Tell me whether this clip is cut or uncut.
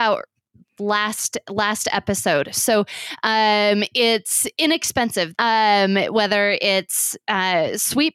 cut